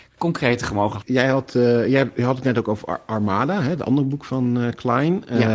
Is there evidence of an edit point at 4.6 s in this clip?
no; 1 cut; at 1.0 s

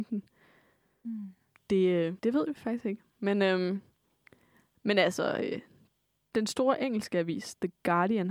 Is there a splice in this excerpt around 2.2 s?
yes; 1 cut; at 2.2 s

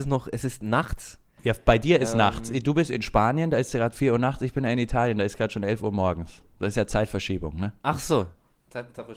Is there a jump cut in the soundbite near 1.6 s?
no; 0 cuts

